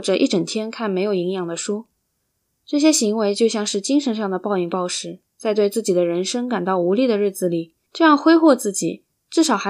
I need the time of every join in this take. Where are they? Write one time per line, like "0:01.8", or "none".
0:05.3
0:07.9

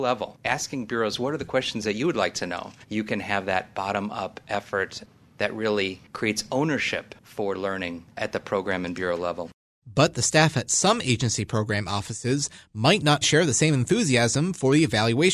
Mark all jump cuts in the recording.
0:02.8
0:13.2

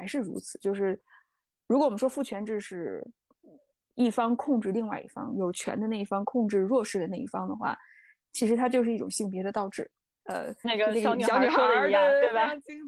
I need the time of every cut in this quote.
0:10.2

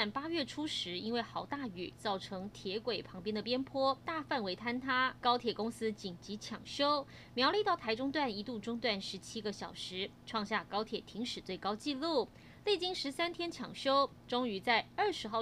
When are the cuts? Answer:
0:05.2

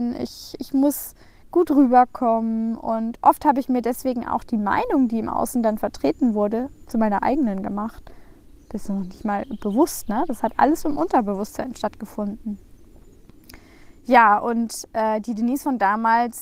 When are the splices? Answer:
none

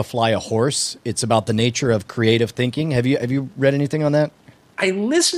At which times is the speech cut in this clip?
none

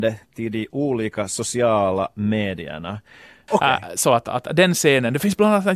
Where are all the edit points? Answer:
0:03.5

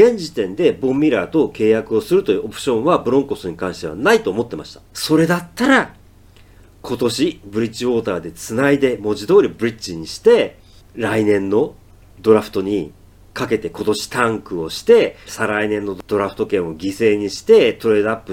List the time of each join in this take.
0:04.9
0:15.3

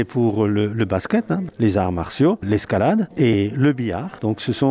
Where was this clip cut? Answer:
0:01.5

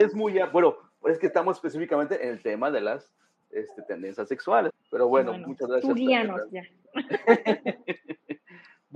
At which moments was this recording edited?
0:04.7
0:06.5

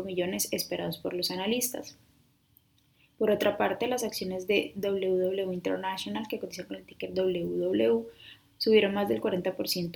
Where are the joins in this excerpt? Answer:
none

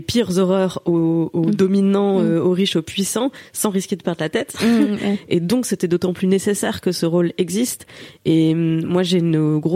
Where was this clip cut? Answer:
none

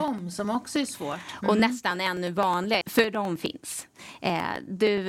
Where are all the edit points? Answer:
0:02.8

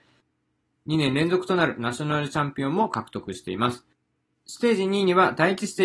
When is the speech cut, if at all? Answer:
none

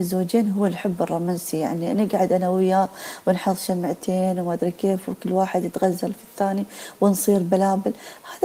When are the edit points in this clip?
none

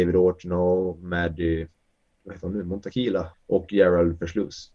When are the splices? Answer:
0:02.1
0:03.3

